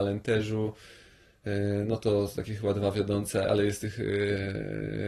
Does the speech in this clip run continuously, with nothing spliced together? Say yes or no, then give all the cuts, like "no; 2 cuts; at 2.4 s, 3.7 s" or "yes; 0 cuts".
no; 1 cut; at 3.4 s